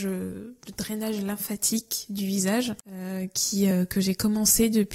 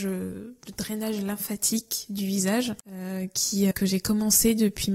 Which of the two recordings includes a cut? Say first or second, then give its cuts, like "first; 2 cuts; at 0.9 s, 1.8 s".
second; 1 cut; at 3.7 s